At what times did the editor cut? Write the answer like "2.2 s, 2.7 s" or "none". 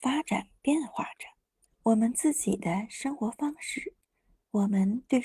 1.7 s